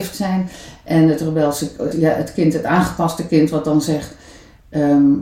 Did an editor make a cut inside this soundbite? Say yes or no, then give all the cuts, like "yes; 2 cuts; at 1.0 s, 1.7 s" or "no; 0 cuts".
yes; 1 cut; at 1.9 s